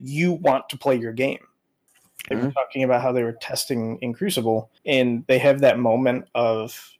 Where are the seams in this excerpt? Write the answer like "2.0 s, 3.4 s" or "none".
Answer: 2.3 s, 4.8 s